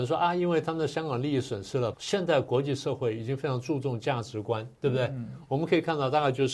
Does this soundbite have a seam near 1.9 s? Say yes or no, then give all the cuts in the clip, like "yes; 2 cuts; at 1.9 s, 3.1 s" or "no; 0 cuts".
yes; 2 cuts; at 1.9 s, 4.8 s